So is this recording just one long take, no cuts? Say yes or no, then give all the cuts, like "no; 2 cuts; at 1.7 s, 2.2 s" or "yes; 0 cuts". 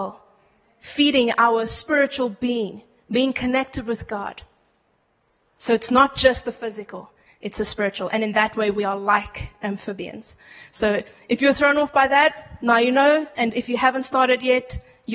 yes; 0 cuts